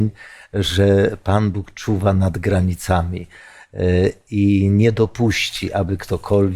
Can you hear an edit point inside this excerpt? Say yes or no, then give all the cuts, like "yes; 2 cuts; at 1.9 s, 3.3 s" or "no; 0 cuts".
no; 0 cuts